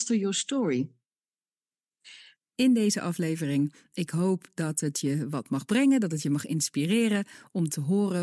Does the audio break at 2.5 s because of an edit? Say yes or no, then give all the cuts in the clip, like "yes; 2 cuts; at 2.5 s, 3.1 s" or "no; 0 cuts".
yes; 1 cut; at 2.5 s